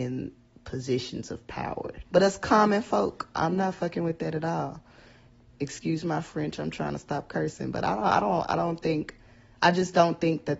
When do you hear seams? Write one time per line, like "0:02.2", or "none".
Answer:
0:02.1
0:03.3